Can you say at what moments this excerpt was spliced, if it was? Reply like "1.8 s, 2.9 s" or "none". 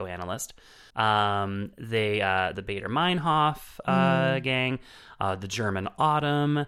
0.9 s, 2.5 s

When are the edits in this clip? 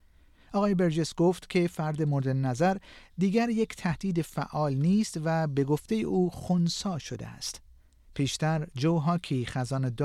8.1 s

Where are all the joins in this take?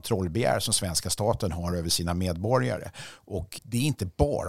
3.6 s

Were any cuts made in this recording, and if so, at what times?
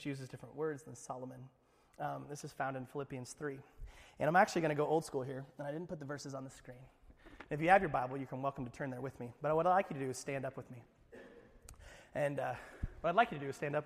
none

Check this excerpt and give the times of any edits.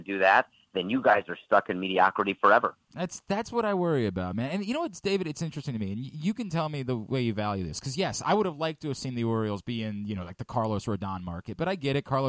none

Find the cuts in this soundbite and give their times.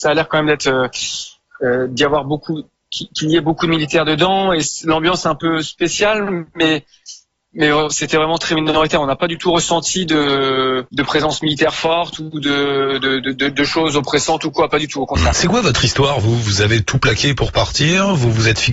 10.9 s, 15.3 s

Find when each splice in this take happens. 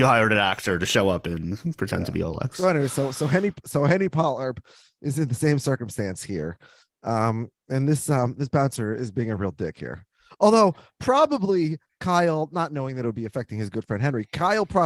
none

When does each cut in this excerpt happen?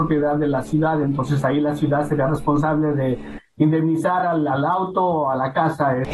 none

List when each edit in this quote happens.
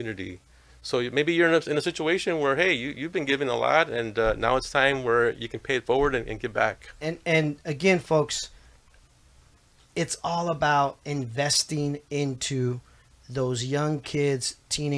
7.0 s

